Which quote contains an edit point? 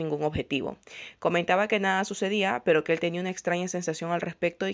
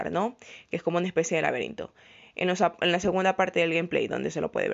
first; 1 cut; at 1.2 s

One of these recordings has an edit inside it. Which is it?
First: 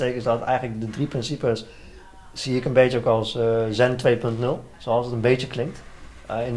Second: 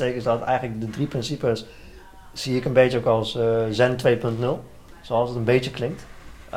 first; 1 cut; at 4.7 s

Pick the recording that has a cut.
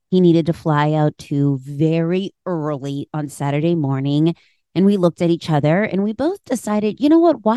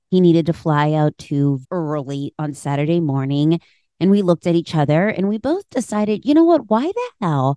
second; 1 cut; at 1.6 s

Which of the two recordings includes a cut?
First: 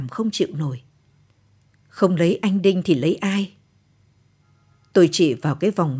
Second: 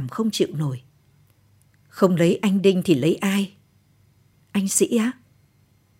second; 1 cut; at 4.3 s

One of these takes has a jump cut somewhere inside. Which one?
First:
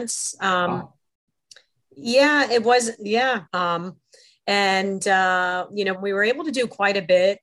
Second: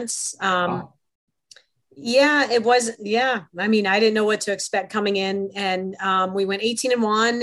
first; 2 cuts; at 3.5 s, 5.9 s

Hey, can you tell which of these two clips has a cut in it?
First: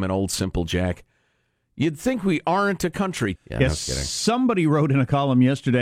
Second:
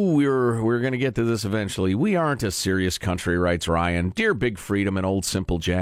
first; 1 cut; at 3.4 s

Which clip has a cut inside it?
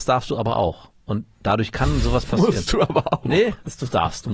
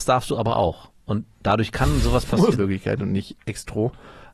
second; 1 cut; at 2.5 s

